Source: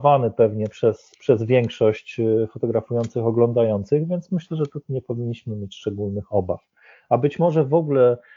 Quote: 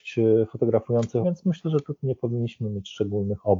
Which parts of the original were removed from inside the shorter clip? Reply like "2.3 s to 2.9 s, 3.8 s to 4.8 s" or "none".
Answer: 3.2 s to 4.1 s